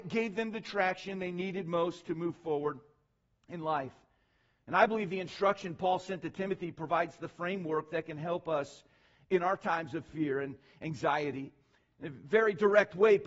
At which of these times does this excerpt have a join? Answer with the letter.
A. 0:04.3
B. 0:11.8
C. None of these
C